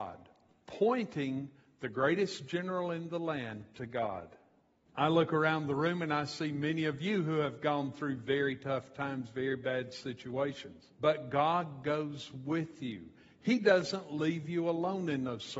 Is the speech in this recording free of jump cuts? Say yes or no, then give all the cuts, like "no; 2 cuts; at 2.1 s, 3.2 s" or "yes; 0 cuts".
no; 2 cuts; at 4.9 s, 10.9 s